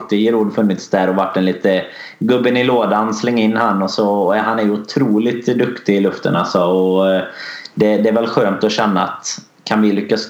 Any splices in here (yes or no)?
no